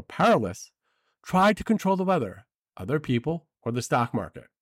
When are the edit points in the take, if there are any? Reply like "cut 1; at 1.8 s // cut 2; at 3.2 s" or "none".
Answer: none